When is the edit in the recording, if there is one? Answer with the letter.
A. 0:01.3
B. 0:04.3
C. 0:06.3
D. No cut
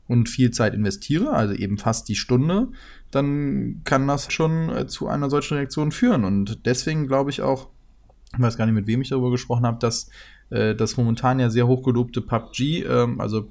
B